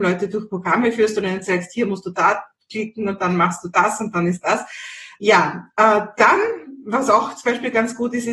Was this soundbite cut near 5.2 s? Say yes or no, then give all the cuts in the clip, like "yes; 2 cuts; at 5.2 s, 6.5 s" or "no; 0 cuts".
yes; 1 cut; at 5.2 s